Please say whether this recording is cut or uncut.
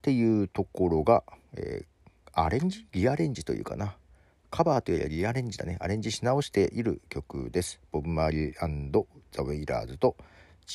uncut